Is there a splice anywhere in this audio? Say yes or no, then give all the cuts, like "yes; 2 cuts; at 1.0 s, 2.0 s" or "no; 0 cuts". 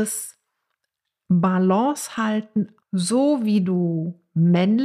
yes; 1 cut; at 2.8 s